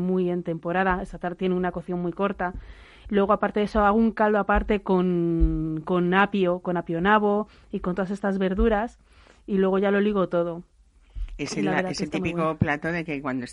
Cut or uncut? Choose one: uncut